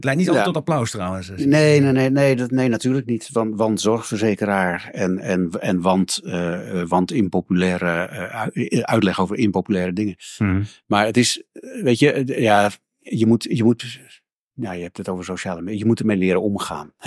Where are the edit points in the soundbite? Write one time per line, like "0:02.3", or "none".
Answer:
none